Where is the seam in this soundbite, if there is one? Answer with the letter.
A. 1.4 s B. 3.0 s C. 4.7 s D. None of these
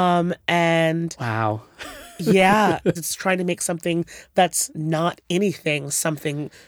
B